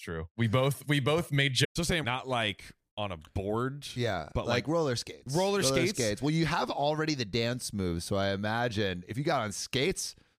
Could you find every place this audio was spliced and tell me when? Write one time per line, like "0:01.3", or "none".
0:02.0